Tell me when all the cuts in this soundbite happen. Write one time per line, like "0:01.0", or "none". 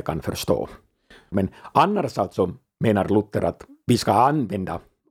0:01.3